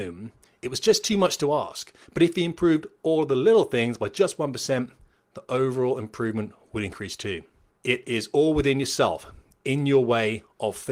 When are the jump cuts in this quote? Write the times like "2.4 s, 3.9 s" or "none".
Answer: 7.7 s